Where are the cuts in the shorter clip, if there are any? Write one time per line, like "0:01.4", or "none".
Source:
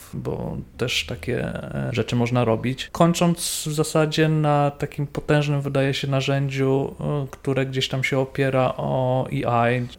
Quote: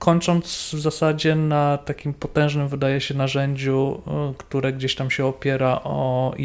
none